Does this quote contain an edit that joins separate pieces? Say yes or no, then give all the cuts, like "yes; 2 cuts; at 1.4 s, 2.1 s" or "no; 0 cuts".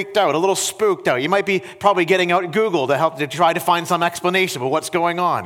no; 0 cuts